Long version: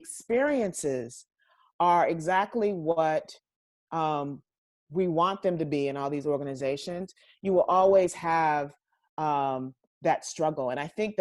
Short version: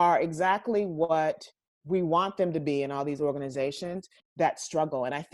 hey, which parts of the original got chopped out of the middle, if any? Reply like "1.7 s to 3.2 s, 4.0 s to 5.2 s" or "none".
3.6 s to 4.7 s, 7.2 s to 9.8 s